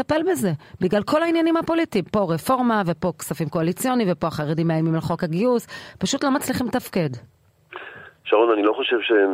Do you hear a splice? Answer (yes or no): no